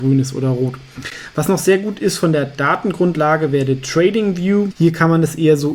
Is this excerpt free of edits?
no; 1 cut; at 4.7 s

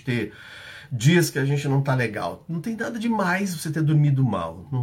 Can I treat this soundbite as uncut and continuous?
yes; 0 cuts

